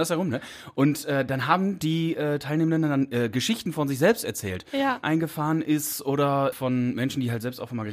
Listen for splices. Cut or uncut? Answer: cut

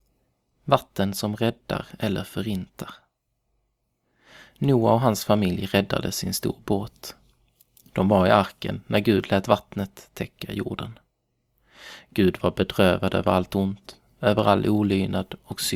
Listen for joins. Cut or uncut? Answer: uncut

